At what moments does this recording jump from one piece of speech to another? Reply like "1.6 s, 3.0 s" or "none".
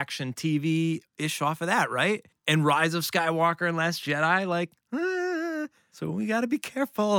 none